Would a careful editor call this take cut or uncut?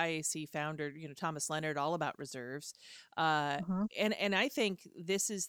uncut